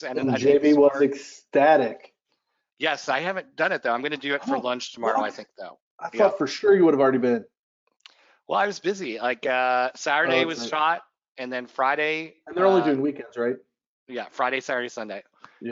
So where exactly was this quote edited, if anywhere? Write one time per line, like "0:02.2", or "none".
none